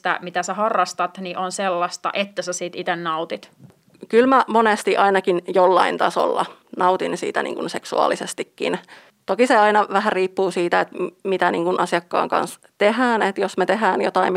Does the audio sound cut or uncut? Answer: uncut